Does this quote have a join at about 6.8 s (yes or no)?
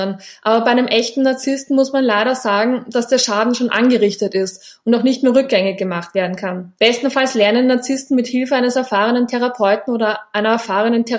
yes